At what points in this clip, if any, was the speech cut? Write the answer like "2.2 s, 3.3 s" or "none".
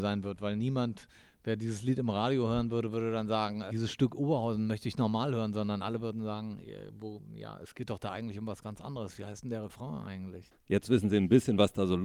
10.5 s